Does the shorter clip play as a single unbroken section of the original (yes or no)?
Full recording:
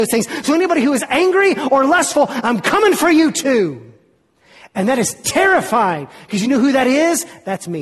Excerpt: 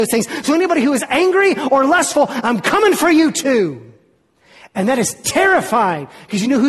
yes